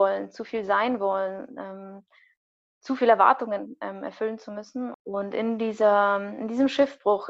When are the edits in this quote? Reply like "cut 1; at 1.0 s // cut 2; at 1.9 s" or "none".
cut 1; at 4.9 s